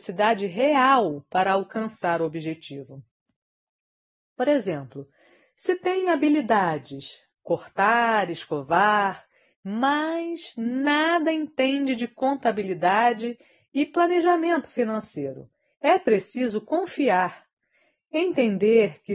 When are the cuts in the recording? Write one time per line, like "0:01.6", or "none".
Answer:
0:07.3
0:09.5
0:15.7